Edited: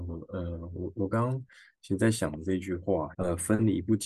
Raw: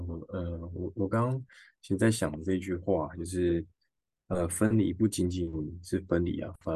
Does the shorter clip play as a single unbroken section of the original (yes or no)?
no